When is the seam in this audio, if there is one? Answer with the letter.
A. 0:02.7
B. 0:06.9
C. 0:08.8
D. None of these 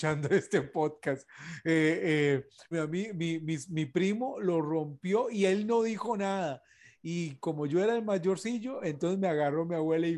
A